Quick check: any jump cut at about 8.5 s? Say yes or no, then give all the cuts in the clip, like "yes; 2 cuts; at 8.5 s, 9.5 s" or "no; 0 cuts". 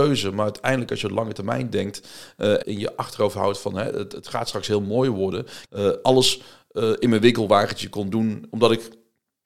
yes; 3 cuts; at 2.6 s, 5.6 s, 8.5 s